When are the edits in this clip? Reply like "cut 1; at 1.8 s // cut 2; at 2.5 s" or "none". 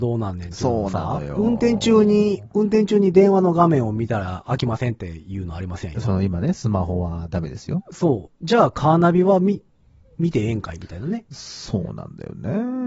cut 1; at 7.8 s